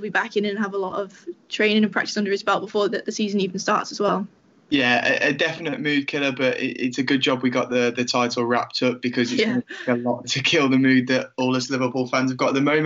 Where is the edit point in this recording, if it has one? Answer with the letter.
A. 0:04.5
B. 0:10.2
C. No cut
B